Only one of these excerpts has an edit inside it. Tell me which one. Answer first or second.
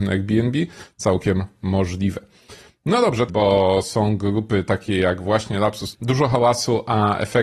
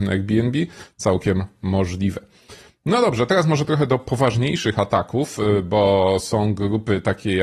first